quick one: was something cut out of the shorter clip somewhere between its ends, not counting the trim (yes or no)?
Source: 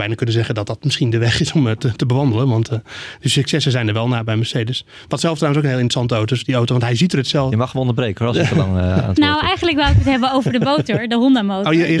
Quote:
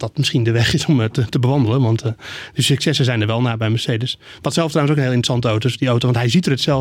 no